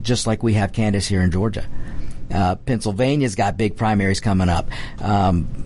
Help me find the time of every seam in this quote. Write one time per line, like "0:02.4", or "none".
0:02.3